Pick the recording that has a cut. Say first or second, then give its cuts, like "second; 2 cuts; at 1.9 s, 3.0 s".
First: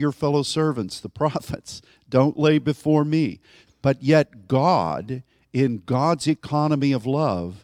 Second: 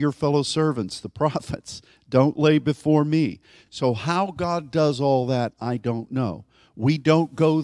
first; 1 cut; at 3.7 s